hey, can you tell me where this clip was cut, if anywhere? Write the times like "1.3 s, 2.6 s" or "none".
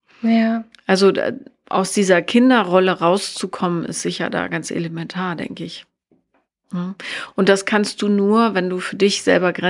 none